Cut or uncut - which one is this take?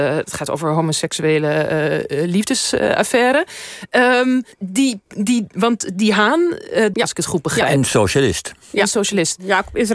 cut